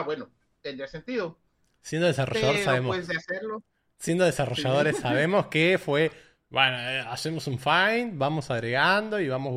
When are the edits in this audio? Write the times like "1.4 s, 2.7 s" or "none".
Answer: none